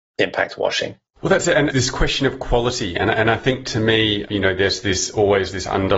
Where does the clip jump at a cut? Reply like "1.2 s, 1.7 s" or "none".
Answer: 1.7 s